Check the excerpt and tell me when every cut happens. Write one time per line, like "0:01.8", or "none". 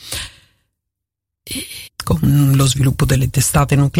0:01.9